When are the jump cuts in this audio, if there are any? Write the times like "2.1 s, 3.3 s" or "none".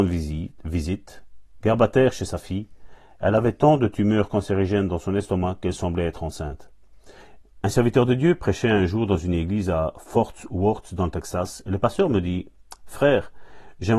7.4 s